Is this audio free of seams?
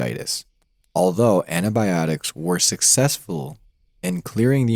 yes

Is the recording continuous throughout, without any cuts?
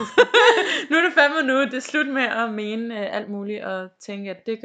yes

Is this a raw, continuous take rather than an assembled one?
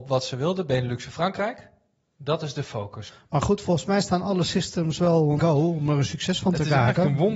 no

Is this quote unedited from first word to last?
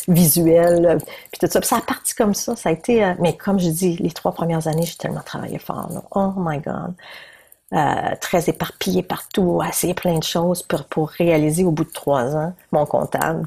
yes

